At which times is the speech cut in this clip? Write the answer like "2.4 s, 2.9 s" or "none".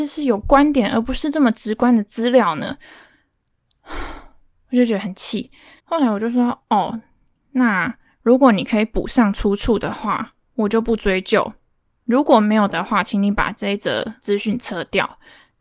5.8 s